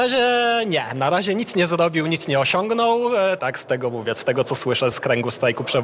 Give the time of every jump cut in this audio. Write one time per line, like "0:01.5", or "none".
0:03.4
0:04.9